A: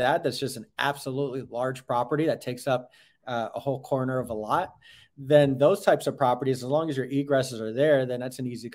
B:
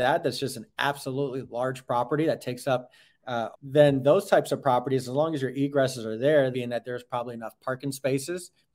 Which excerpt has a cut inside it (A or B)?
B